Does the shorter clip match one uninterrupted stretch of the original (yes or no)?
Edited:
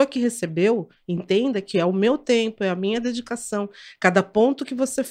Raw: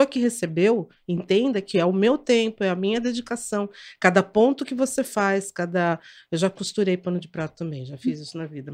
yes